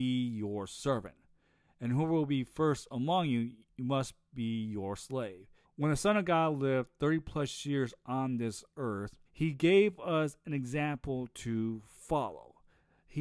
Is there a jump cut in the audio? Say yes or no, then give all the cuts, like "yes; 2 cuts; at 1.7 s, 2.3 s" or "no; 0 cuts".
yes; 2 cuts; at 5.6 s, 9.3 s